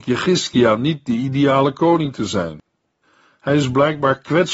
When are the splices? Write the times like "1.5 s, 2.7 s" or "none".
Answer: none